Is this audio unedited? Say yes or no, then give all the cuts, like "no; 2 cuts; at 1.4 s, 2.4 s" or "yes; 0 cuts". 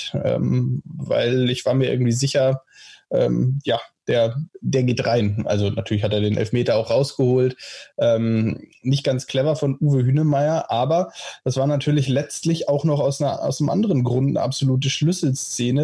yes; 0 cuts